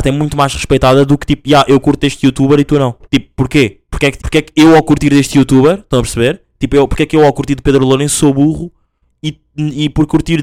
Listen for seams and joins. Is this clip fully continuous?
no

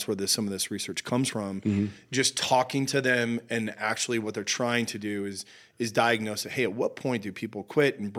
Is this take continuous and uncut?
yes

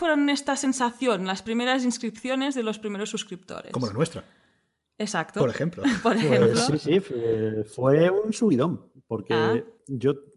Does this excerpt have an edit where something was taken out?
no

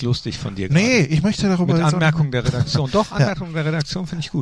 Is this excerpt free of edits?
yes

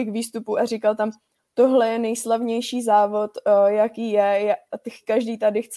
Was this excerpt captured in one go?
yes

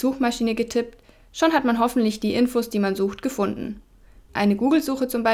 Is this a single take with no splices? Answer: yes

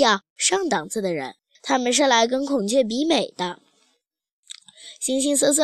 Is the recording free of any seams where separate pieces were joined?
no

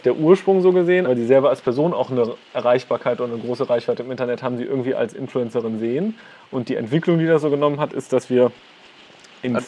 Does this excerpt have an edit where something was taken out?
yes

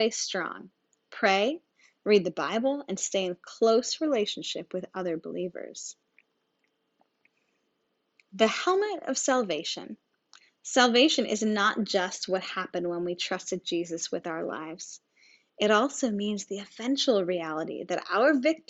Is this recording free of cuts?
yes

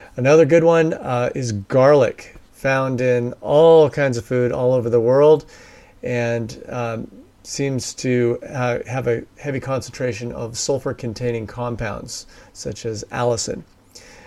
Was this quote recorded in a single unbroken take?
yes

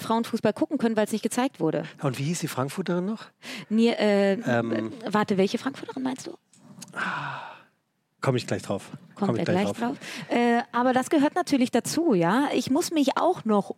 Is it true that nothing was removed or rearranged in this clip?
yes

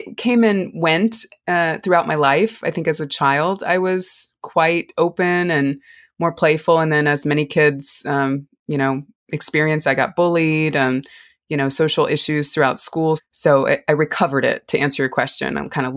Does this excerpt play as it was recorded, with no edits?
no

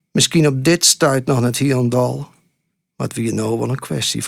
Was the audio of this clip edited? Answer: no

